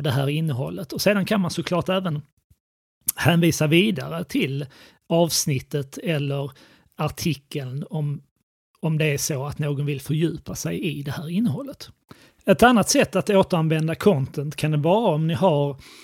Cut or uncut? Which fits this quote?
uncut